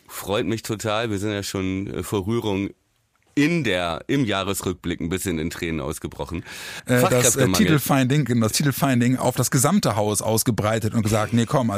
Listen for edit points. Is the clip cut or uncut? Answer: cut